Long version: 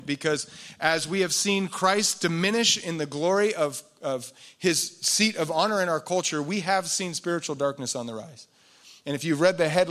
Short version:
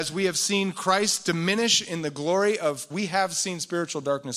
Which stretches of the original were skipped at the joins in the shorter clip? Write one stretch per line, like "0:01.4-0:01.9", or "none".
0:03.9-0:06.4